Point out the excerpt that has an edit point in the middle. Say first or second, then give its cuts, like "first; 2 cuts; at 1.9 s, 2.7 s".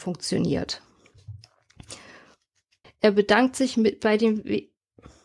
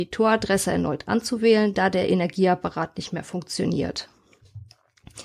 first; 1 cut; at 2.8 s